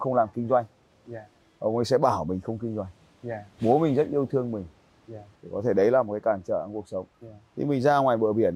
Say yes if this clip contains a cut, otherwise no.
yes